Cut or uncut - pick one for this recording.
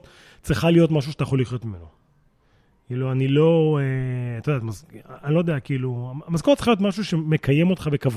uncut